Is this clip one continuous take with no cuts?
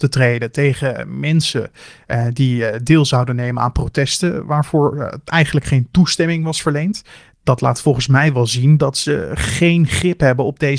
yes; 0 cuts

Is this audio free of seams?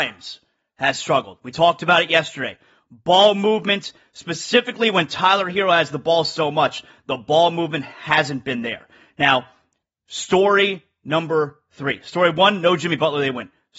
yes; 0 cuts

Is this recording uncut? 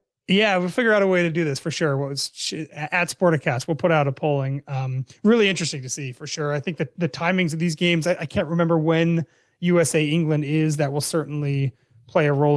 yes; 0 cuts

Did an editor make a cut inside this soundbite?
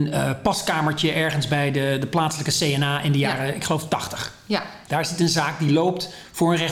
yes; 1 cut; at 4.9 s

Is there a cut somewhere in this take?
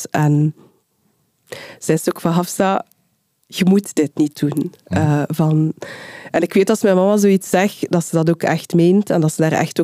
no; 0 cuts

